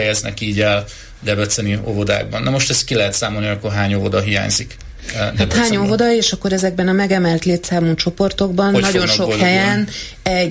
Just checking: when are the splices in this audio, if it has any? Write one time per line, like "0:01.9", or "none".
none